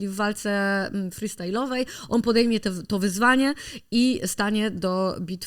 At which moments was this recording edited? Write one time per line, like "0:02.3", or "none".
none